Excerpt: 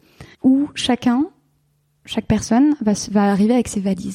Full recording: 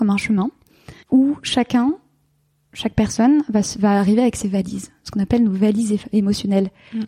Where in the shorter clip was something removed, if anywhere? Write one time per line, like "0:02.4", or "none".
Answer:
none